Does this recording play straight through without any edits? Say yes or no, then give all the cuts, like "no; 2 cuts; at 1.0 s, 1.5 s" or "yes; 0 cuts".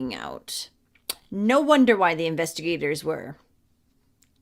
yes; 0 cuts